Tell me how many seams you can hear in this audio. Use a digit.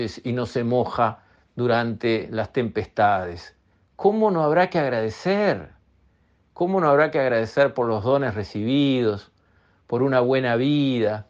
0